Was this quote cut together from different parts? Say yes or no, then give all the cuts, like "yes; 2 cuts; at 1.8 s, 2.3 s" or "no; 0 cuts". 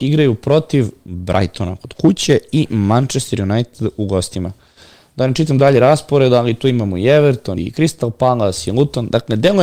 yes; 1 cut; at 7.5 s